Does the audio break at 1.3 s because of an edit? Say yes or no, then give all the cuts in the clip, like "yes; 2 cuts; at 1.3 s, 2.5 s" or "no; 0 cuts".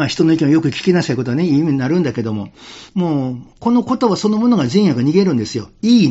no; 1 cut; at 2.9 s